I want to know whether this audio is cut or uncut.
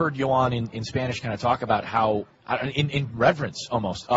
cut